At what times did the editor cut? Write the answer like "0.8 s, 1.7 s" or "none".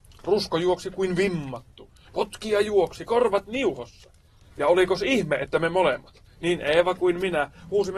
none